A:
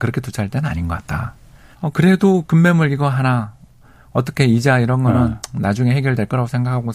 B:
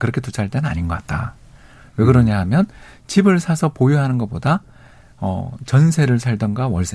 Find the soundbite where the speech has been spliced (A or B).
A